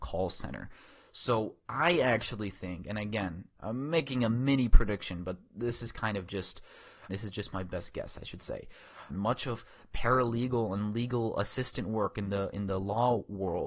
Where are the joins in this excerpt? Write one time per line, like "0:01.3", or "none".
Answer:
0:07.1
0:09.1